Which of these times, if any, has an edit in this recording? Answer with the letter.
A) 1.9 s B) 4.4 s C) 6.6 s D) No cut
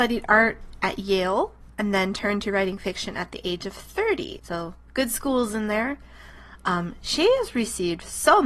B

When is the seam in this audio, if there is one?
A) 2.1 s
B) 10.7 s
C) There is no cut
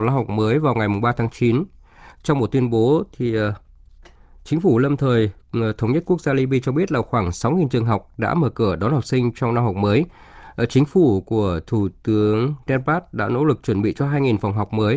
C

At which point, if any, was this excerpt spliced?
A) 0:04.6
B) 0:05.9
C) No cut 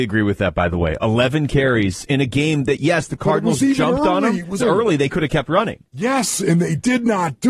A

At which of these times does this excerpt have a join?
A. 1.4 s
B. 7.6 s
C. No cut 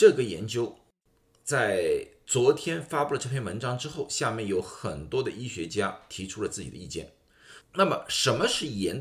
B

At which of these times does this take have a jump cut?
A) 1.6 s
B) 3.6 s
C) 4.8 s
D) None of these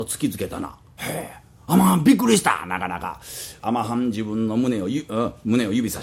B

